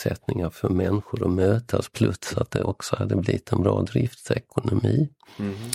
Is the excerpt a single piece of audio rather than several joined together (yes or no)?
yes